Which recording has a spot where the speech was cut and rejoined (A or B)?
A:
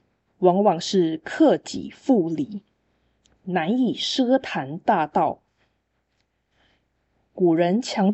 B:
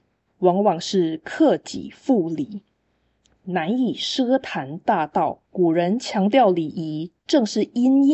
B